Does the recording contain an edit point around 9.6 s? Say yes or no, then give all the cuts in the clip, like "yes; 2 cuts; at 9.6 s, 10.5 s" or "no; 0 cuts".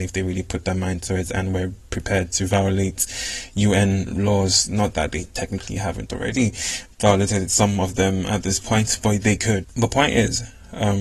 yes; 1 cut; at 9.6 s